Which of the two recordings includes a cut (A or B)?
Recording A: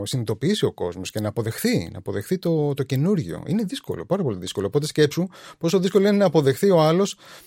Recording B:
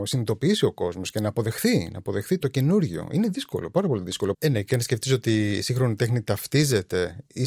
B